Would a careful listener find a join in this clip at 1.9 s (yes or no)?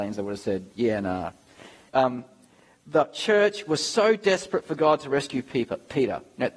yes